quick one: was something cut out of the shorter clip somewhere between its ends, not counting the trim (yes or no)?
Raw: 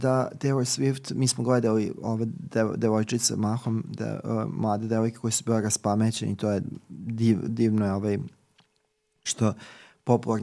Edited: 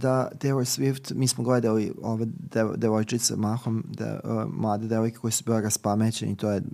no